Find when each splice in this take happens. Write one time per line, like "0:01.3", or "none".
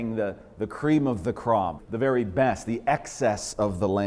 0:01.8